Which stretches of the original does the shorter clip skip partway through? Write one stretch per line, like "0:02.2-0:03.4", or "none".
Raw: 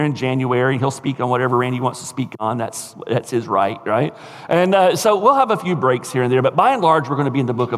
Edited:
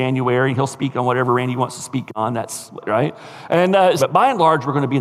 0:03.0-0:03.8
0:05.0-0:06.4